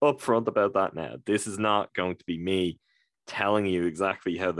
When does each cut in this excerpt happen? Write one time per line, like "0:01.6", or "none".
none